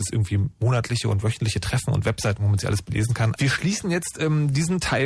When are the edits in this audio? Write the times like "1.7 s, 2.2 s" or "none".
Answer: 3.4 s